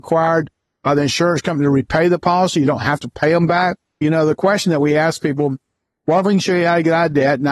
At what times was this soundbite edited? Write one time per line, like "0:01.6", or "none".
0:04.0